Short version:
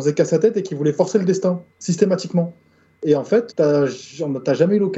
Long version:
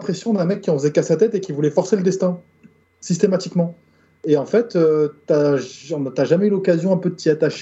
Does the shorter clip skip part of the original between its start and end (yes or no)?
yes